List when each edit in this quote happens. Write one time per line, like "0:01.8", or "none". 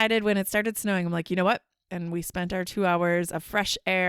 0:01.9